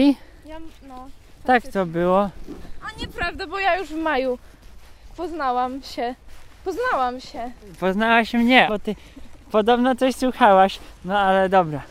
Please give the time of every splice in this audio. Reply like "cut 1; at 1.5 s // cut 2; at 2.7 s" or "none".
cut 1; at 8.7 s // cut 2; at 11.0 s